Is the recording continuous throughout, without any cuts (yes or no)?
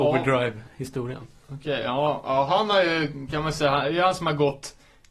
yes